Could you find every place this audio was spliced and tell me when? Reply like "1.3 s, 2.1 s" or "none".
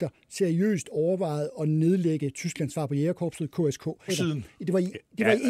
4.1 s